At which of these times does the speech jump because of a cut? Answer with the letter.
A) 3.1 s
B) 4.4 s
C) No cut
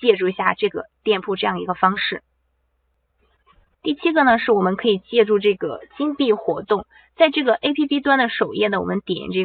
C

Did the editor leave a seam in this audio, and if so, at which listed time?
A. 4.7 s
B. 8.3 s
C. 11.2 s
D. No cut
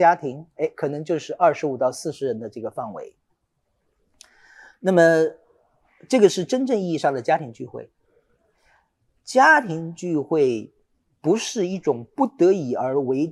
D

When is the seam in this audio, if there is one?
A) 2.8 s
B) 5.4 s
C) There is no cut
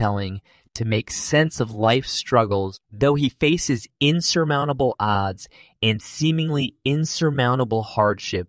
A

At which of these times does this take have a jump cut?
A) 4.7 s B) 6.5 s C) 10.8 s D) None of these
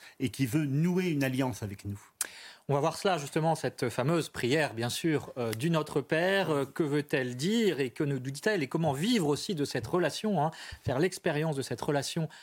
D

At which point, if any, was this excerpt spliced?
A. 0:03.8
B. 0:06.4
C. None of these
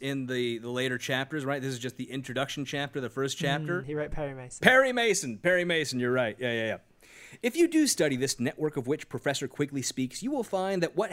A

